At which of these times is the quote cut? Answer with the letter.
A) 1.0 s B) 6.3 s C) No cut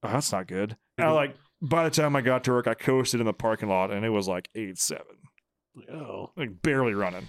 A